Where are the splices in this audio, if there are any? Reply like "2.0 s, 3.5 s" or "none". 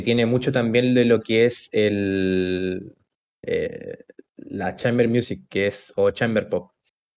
none

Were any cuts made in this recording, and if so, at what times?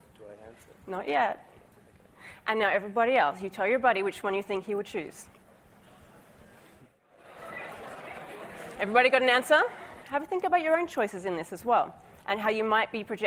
8.8 s, 10.0 s

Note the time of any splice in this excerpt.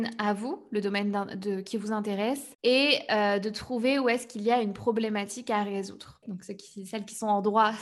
6.2 s

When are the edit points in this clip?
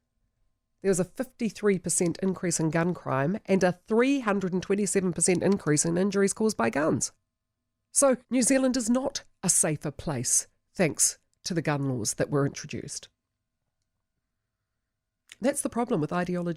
8.2 s

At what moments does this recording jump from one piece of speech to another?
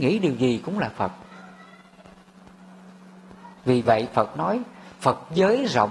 3.6 s

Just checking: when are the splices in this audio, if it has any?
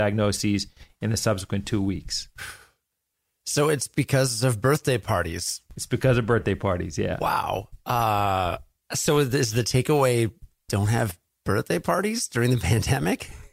none

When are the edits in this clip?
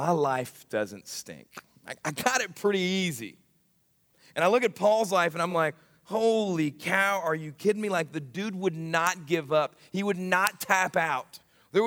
none

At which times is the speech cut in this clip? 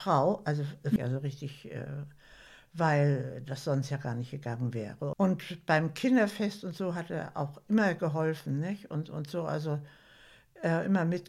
1.0 s, 5.1 s

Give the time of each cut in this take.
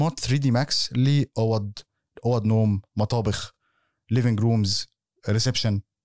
none

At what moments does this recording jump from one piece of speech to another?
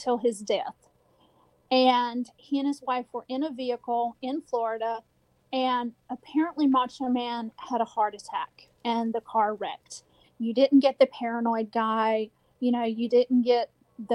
10.2 s

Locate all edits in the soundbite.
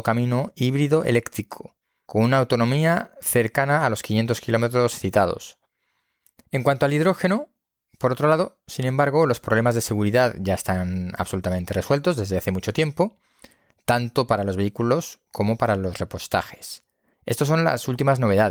2.1 s, 6.4 s, 17.1 s

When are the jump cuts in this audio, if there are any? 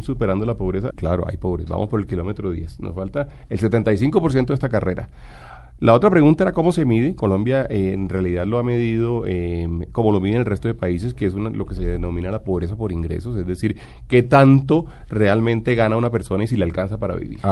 0.9 s

